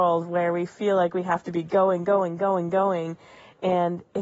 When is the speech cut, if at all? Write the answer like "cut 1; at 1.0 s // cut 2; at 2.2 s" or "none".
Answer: none